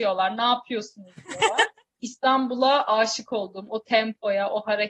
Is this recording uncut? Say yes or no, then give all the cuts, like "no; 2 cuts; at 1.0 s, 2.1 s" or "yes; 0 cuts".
no; 1 cut; at 2.0 s